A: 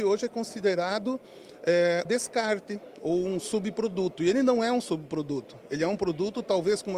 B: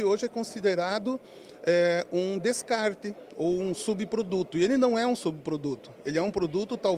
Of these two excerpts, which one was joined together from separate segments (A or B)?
A